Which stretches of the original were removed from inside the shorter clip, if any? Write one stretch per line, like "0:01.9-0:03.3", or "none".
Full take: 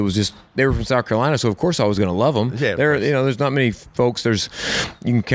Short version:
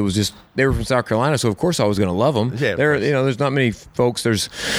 none